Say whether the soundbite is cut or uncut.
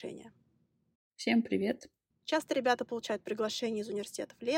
cut